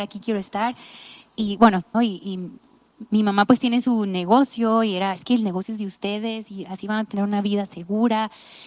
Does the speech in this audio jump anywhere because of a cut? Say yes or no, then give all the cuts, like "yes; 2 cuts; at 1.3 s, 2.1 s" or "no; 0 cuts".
yes; 2 cuts; at 1.9 s, 5.2 s